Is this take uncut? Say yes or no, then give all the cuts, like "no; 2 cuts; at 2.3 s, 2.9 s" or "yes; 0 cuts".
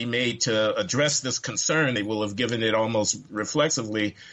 yes; 0 cuts